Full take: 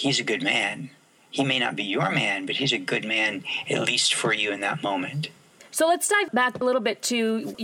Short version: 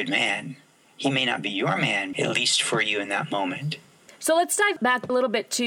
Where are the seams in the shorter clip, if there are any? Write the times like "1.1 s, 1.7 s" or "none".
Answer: 2.1 s